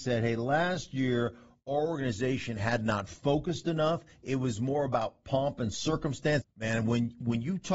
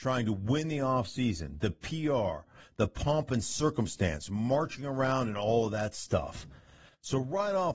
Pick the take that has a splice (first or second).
first